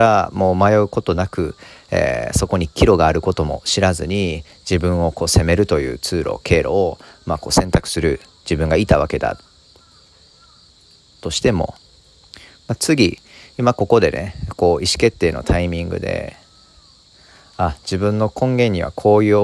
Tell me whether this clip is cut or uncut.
uncut